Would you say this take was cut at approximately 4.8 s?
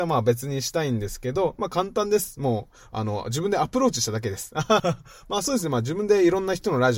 yes; 1 cut; at 4.8 s

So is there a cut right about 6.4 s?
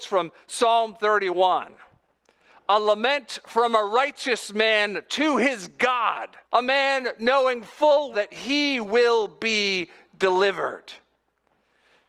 yes; 2 cuts; at 6.4 s, 8.1 s

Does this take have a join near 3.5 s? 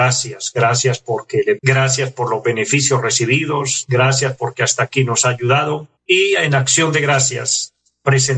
no; 2 cuts; at 1.6 s, 6.0 s

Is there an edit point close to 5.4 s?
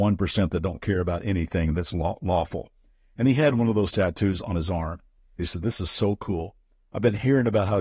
yes; 1 cut; at 5.4 s

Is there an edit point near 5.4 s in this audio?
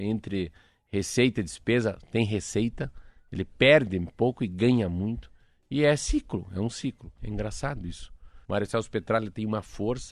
no; 2 cuts; at 7.2 s, 8.4 s

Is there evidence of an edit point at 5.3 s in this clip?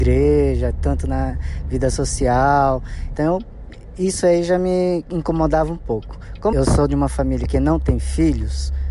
no; 2 cuts; at 3.2 s, 6.5 s

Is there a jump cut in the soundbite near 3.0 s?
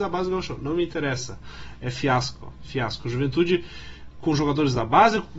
no; 0 cuts

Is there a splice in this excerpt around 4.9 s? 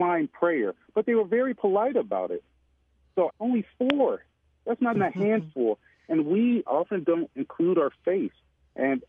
yes; 3 cuts; at 3.3 s, 4.9 s, 6.7 s

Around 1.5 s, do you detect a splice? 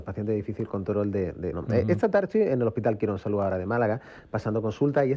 yes; 1 cut; at 1.5 s

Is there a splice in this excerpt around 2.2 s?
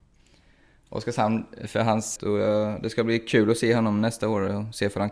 yes; 1 cut; at 2.2 s

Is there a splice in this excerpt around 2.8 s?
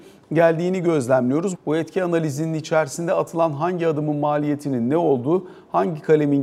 no; 1 cut; at 1.5 s

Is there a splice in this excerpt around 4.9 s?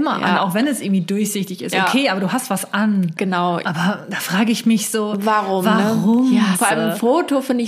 no; 2 cuts; at 3.6 s, 6.5 s

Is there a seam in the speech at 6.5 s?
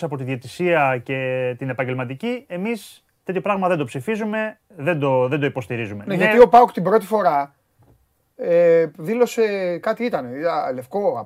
no; 0 cuts

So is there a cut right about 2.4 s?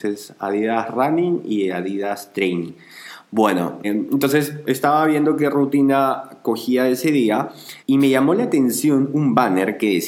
no; 2 cuts; at 3.8 s, 7.8 s

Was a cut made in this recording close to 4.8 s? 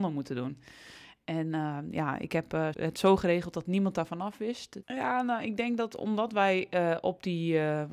yes; 2 cuts; at 2.7 s, 4.8 s

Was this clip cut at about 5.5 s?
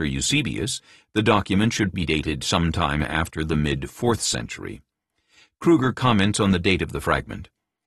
no; 1 cut; at 1.9 s

